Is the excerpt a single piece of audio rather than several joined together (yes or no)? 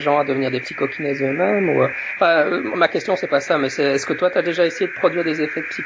yes